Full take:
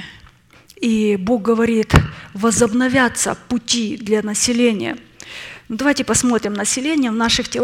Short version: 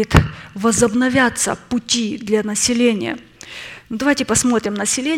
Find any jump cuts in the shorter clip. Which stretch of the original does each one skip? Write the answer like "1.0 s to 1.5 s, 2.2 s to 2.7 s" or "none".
none